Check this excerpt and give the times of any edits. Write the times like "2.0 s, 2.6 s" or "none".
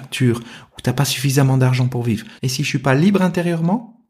2.4 s